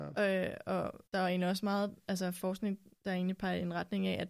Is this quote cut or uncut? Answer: cut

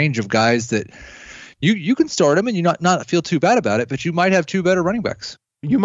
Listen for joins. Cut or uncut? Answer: uncut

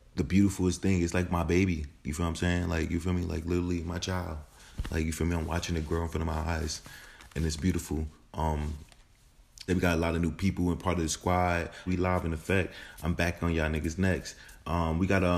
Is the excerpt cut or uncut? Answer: cut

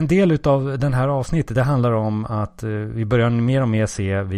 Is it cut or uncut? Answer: uncut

